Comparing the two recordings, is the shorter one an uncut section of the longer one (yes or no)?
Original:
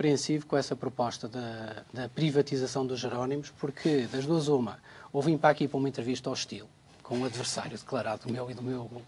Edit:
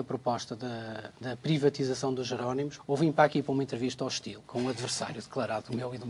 no